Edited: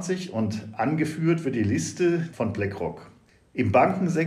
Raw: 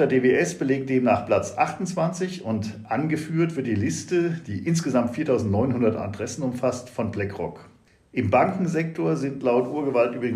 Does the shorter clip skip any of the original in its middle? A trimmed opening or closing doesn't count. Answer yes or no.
yes